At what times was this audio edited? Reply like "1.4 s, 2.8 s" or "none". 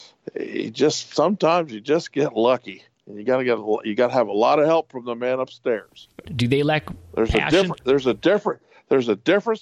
6.3 s